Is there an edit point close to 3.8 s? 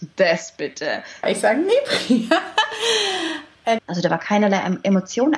yes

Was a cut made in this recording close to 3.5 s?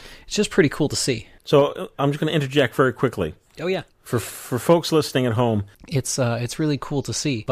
no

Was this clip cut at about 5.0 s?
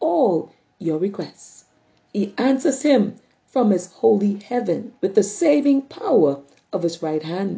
yes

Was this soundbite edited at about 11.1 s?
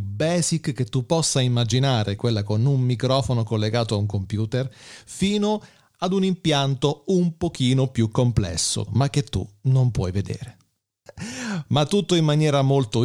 yes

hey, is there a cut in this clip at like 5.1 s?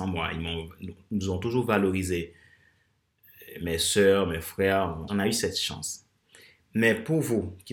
yes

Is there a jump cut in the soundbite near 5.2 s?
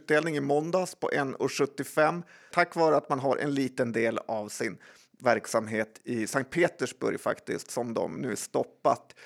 no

